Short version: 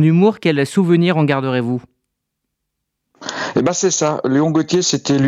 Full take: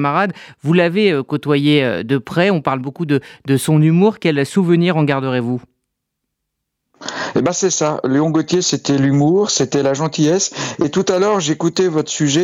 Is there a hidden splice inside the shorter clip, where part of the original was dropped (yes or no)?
no